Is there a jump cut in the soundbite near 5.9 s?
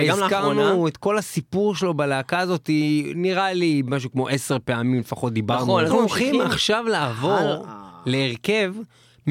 yes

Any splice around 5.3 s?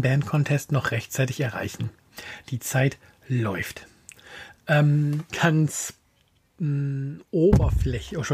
yes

